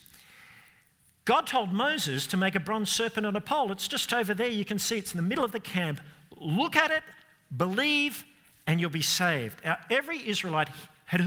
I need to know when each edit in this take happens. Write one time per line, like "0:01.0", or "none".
none